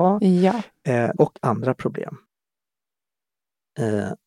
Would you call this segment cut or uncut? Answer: cut